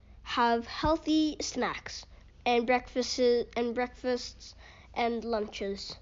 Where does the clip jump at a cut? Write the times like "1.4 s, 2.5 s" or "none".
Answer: none